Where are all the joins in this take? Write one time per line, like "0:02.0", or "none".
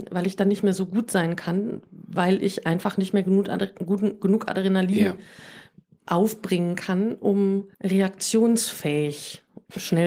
0:07.7